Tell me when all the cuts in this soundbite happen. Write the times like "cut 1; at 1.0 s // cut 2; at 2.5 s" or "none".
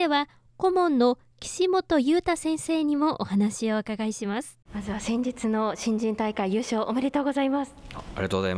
cut 1; at 4.6 s